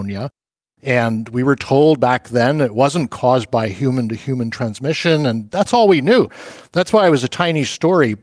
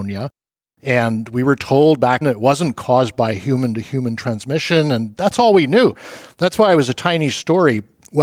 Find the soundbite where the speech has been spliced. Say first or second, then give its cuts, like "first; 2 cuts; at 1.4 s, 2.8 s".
second; 1 cut; at 2.2 s